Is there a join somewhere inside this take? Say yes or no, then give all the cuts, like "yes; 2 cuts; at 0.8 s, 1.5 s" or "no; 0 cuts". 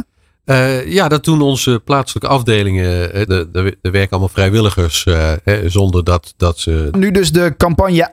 yes; 2 cuts; at 3.3 s, 6.9 s